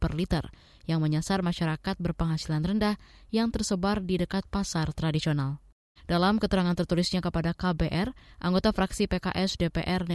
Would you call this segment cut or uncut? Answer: cut